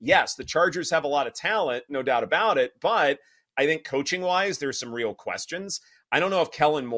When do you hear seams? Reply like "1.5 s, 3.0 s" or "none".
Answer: none